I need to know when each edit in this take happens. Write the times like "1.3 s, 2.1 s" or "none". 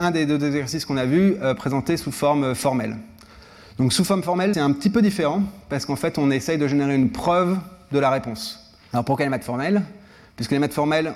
4.5 s, 8.9 s